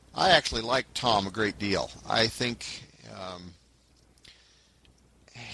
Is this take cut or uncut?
uncut